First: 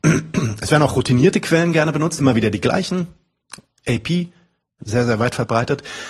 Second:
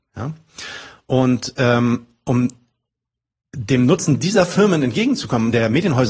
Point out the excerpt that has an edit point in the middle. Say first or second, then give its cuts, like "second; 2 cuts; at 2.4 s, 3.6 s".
first; 2 cuts; at 2.2 s, 4.8 s